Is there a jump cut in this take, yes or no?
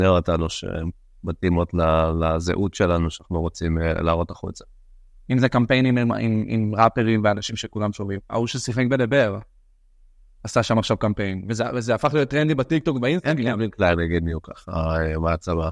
yes